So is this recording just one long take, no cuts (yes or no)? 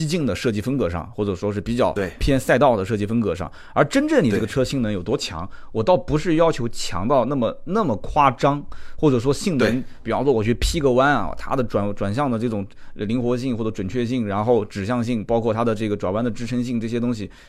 yes